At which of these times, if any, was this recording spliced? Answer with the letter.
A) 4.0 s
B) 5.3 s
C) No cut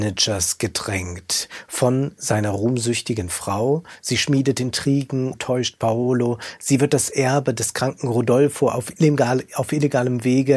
B